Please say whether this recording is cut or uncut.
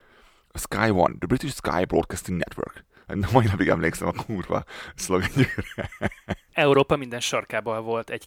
cut